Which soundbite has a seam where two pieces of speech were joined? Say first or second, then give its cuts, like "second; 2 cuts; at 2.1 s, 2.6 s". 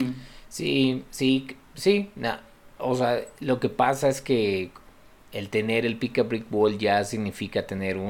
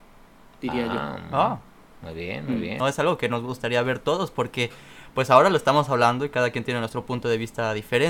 second; 1 cut; at 2.8 s